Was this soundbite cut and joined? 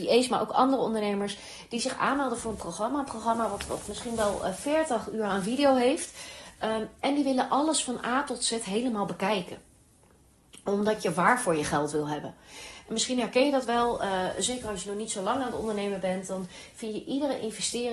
no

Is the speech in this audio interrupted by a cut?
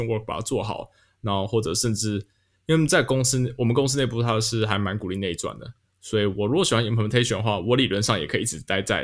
no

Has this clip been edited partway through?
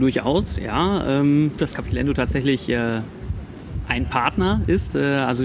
yes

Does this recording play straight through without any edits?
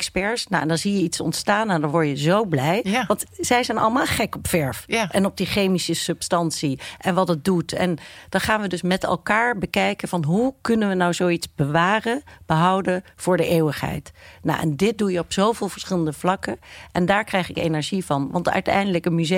yes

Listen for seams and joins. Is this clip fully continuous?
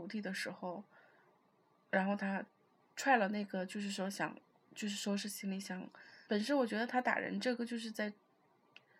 no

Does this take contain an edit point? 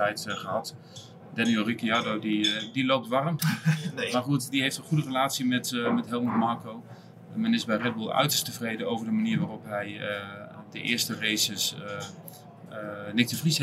yes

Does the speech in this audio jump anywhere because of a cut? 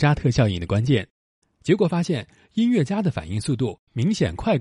yes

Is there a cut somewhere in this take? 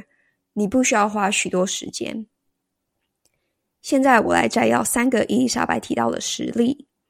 no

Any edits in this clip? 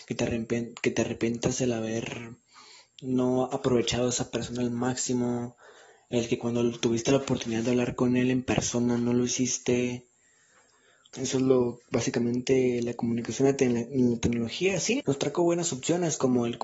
yes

